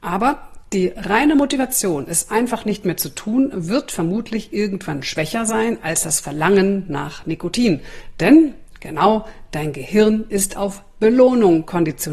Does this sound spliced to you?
no; 0 cuts

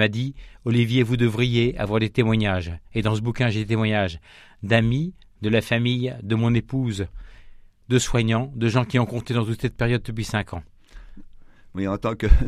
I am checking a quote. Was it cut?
no; 0 cuts

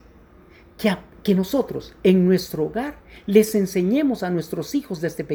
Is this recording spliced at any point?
no; 0 cuts

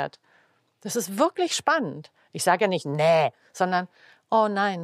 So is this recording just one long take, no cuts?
yes; 0 cuts

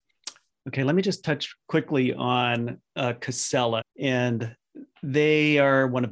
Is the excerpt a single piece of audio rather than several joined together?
no; 1 cut; at 3.8 s

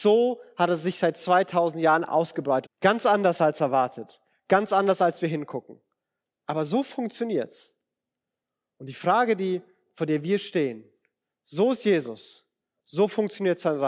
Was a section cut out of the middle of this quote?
yes; 1 cut; at 2.6 s

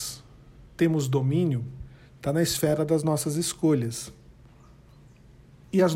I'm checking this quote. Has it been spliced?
no; 0 cuts

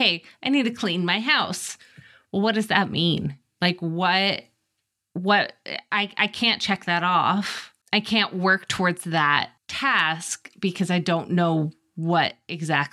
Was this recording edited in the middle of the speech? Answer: yes; 2 cuts; at 7.8 s, 9.6 s

